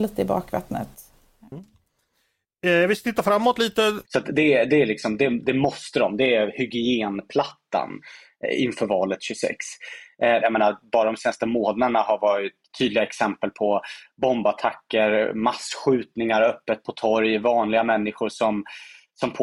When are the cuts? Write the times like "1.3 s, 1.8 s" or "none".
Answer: 4.0 s, 10.4 s